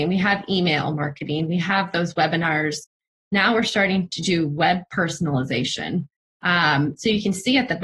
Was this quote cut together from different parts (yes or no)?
no